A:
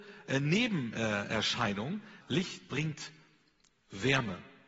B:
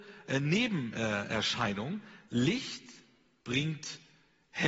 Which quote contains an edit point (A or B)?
A